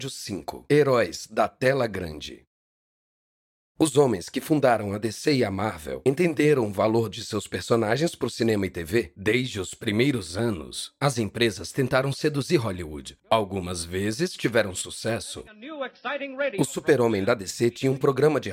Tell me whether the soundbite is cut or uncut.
uncut